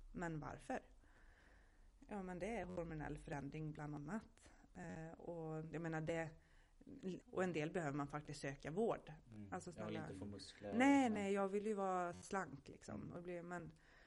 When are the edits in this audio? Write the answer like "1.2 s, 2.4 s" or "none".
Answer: 7.2 s, 9.2 s